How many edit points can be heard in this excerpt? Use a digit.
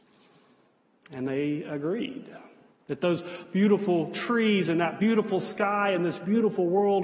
1